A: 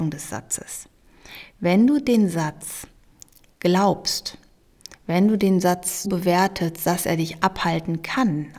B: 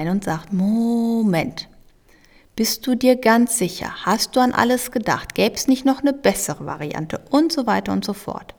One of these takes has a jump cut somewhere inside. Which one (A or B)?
A